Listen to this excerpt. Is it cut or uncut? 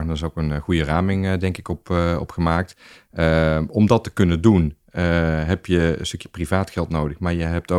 uncut